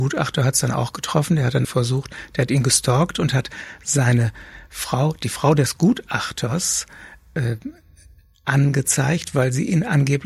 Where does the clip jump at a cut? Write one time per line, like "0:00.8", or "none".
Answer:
0:01.6